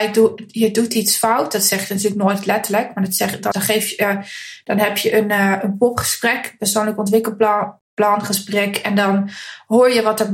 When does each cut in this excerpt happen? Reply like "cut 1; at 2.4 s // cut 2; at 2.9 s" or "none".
cut 1; at 3.5 s